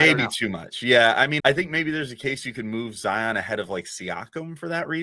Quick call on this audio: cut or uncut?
cut